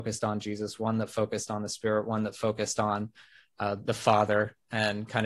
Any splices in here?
no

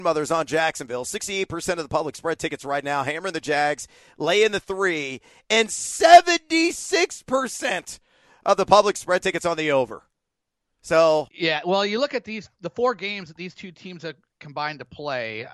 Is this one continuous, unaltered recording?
no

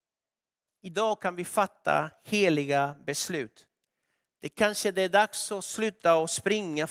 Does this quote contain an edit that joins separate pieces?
no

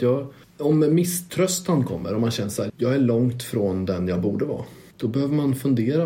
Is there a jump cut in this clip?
yes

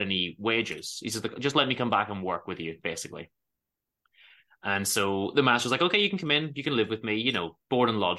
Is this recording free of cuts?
yes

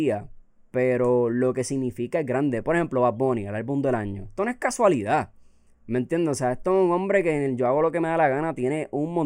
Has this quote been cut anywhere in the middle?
no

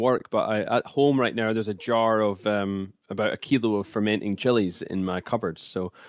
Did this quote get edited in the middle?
no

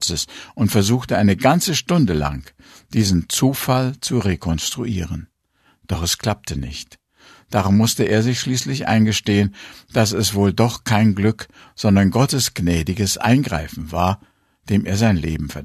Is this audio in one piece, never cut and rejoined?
yes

